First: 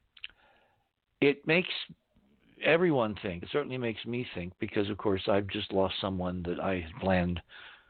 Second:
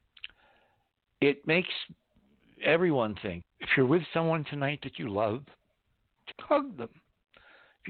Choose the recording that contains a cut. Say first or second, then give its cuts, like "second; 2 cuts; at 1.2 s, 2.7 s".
second; 2 cuts; at 3.4 s, 6.3 s